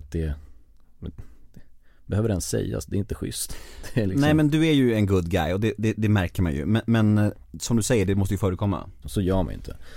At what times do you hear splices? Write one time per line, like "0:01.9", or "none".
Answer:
0:09.0